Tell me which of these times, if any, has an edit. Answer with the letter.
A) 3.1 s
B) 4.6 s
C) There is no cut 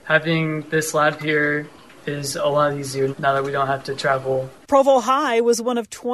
A